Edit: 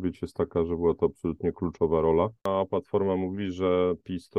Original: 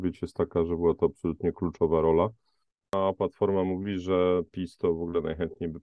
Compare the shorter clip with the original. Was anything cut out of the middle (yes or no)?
yes